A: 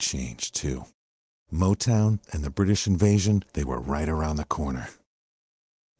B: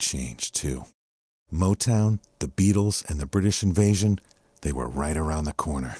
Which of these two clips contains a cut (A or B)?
A